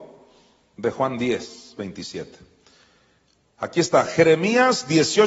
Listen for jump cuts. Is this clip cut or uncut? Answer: uncut